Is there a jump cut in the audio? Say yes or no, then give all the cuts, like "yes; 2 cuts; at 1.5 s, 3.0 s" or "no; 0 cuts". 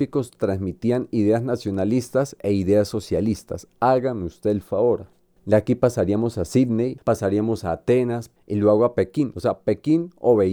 no; 0 cuts